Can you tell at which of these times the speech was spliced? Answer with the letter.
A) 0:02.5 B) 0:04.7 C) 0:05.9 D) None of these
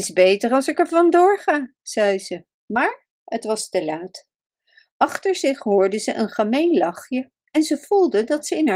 A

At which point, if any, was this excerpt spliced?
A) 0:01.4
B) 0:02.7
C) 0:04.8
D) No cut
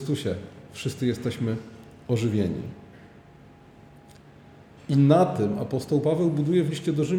C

